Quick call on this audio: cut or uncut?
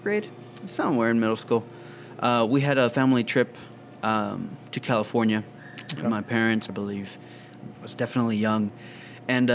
cut